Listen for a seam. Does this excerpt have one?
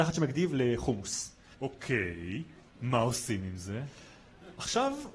yes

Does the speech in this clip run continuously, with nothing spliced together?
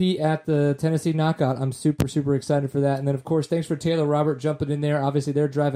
yes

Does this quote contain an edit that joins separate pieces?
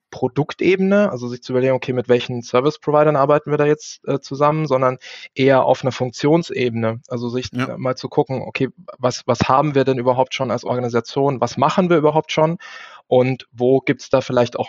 no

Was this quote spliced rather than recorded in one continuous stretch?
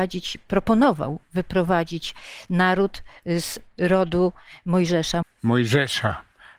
yes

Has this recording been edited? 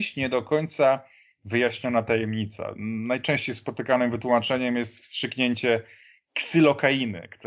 no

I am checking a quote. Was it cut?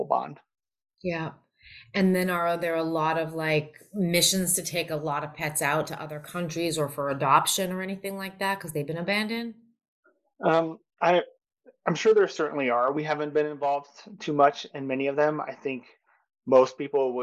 no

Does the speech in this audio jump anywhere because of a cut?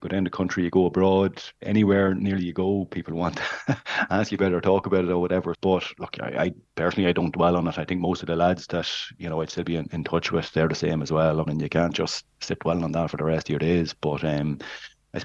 yes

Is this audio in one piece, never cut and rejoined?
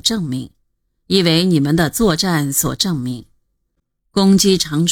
yes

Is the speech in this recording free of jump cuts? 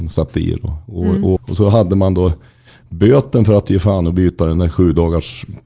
no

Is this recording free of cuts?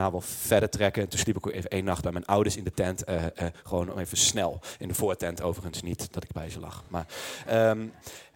yes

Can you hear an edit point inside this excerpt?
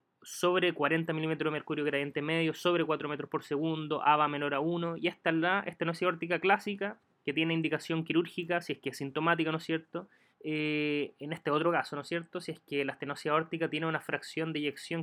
yes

